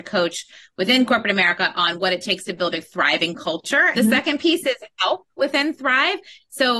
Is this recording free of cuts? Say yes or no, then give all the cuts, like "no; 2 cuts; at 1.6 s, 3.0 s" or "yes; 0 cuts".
no; 1 cut; at 3.9 s